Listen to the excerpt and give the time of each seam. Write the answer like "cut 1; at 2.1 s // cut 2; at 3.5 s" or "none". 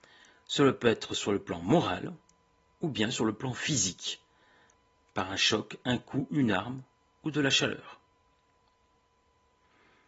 none